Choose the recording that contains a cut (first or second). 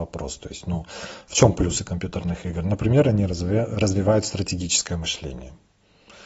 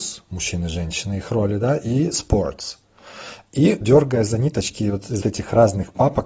second